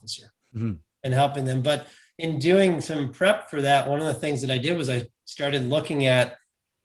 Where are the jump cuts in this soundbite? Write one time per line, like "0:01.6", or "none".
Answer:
none